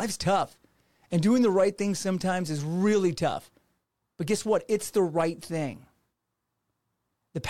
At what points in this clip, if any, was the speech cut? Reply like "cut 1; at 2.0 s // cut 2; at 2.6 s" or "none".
none